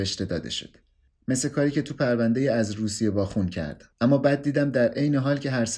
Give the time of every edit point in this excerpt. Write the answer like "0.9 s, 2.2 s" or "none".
1.1 s, 3.9 s